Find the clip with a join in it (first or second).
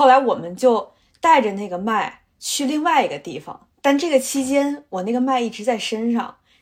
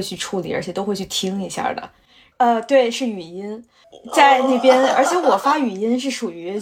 second